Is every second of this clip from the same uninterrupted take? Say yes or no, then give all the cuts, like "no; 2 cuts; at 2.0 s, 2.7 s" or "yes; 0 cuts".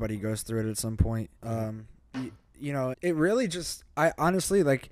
no; 2 cuts; at 1.4 s, 2.9 s